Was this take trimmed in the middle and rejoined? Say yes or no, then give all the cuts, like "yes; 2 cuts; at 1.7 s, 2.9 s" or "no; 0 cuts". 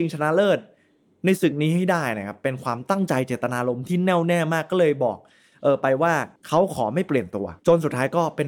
yes; 1 cut; at 6.4 s